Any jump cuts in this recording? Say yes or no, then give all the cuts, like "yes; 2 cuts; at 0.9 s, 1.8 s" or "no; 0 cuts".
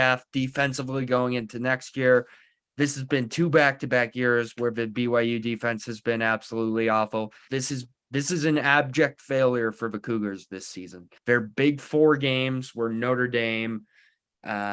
yes; 2 cuts; at 7.5 s, 11.2 s